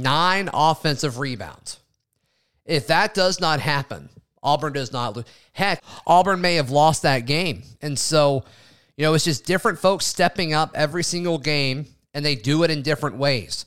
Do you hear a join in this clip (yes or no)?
yes